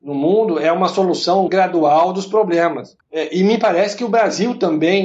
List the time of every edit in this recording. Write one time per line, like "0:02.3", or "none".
0:01.5
0:03.0